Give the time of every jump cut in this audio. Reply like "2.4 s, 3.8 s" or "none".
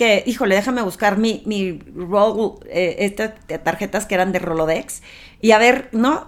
none